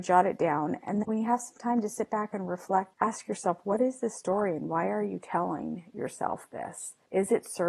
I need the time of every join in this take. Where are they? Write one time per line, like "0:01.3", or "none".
0:01.0